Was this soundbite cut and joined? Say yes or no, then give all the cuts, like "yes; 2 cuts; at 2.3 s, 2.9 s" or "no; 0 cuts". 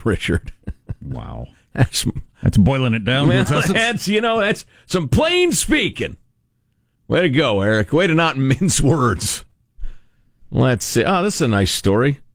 no; 0 cuts